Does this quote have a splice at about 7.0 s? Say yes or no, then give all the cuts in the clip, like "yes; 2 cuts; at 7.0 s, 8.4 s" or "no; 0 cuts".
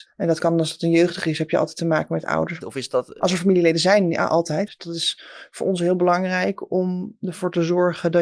no; 2 cuts; at 2.6 s, 4.7 s